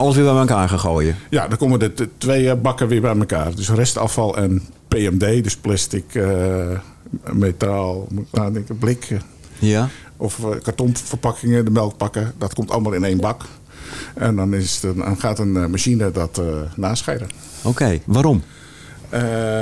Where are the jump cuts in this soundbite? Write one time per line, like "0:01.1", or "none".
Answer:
0:08.3
0:18.0